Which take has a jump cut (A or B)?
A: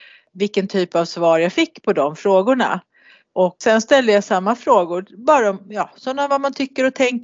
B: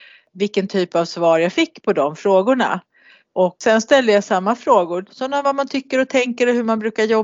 B